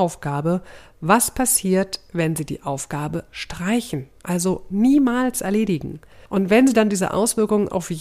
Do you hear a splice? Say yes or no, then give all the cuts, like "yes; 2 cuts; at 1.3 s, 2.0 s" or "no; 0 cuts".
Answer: yes; 2 cuts; at 3.3 s, 6.3 s